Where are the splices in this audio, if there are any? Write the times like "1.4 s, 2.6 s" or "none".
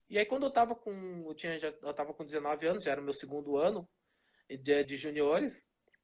4.8 s